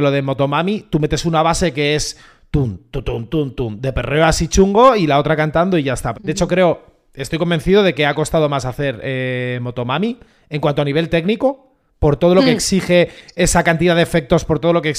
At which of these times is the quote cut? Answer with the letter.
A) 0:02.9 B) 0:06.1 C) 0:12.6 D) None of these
B